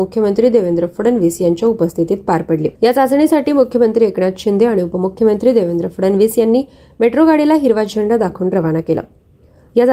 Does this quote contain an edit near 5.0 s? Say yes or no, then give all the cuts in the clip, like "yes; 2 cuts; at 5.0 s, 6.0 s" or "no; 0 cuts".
no; 1 cut; at 2.7 s